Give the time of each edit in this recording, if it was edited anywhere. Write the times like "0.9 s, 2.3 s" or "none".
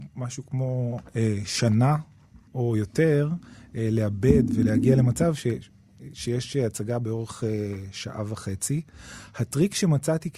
2.5 s